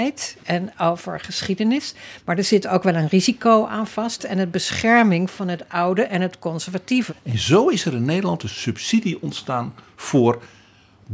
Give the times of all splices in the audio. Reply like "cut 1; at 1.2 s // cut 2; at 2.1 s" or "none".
cut 1; at 4.2 s // cut 2; at 7.1 s